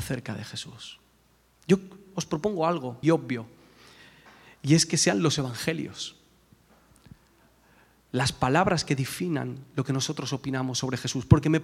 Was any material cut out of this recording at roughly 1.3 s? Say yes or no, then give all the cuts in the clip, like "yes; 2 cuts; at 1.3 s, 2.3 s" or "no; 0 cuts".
no; 1 cut; at 3.0 s